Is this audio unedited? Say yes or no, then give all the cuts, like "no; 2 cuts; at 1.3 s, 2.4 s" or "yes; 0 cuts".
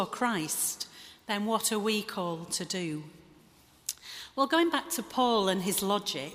yes; 0 cuts